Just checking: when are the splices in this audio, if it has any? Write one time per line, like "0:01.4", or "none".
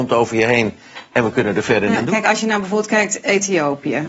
0:02.0

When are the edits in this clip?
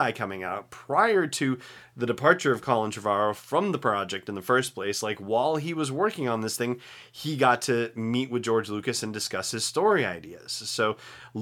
none

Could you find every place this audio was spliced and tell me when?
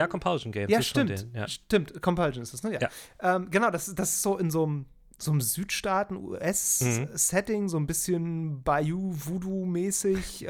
none

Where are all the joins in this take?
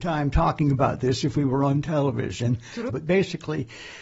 0:02.9

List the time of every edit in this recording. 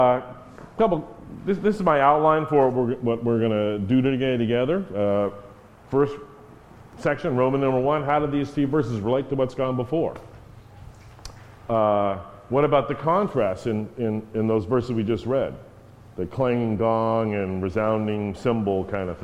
none

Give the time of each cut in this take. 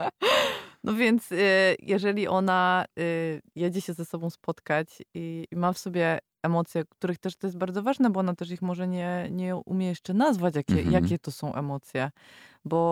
0:05.5

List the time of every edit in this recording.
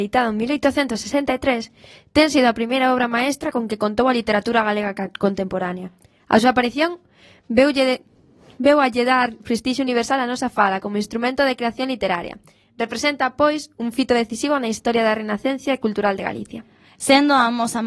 0:16.9

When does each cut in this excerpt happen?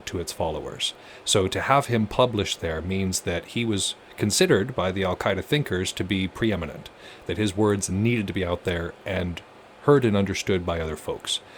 none

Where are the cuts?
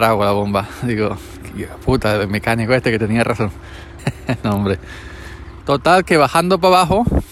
0:04.0
0:05.6

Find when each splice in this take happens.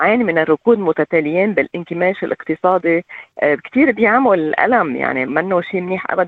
0:05.3

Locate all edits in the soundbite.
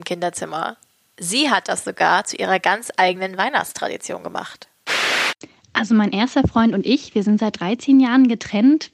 none

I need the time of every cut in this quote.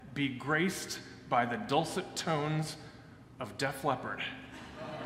0:03.3

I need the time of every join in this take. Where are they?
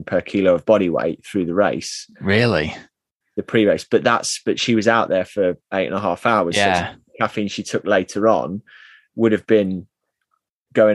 none

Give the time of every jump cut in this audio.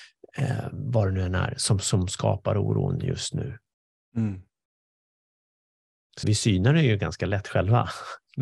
0:06.2

